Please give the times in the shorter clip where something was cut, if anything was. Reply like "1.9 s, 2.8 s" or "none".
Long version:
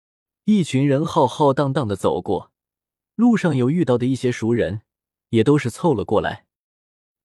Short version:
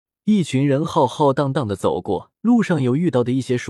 2.4 s